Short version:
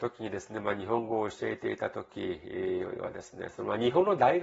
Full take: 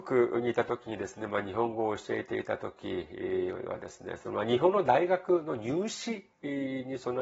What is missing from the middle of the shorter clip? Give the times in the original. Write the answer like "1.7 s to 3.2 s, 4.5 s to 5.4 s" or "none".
none